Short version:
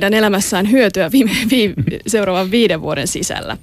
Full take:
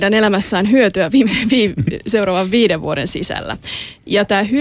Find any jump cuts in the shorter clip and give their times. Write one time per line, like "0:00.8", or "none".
none